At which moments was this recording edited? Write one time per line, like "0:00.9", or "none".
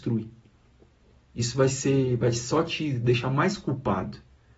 0:01.2